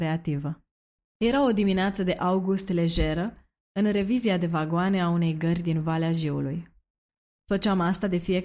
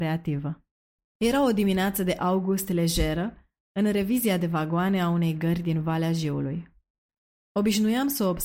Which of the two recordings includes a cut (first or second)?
first